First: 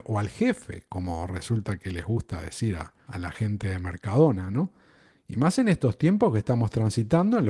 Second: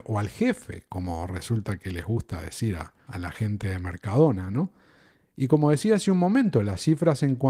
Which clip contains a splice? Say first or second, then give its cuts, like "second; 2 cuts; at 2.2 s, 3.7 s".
first; 1 cut; at 5.2 s